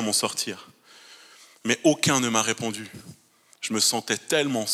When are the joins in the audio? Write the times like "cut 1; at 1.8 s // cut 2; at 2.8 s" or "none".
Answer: none